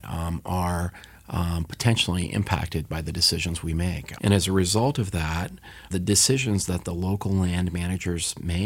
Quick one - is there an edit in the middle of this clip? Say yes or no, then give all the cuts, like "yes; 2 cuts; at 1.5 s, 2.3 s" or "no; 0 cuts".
yes; 2 cuts; at 4.2 s, 5.9 s